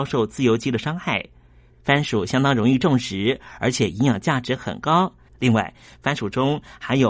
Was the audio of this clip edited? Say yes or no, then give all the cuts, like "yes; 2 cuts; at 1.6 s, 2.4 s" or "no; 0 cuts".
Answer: yes; 2 cuts; at 1.7 s, 5.3 s